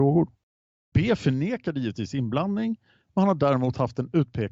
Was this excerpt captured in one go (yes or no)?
no